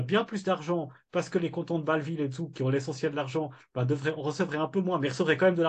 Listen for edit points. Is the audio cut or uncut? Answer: uncut